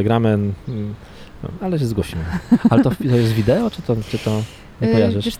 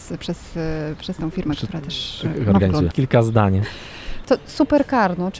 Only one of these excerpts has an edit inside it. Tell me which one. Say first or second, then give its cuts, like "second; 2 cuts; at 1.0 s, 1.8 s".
second; 2 cuts; at 2.9 s, 4.2 s